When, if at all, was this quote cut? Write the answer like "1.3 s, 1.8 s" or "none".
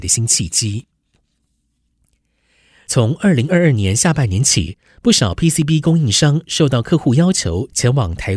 none